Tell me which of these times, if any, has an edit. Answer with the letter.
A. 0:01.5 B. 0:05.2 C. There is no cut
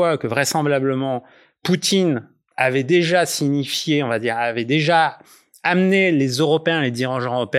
C